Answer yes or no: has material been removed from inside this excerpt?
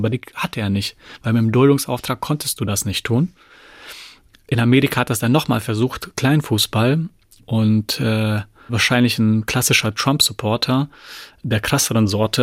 no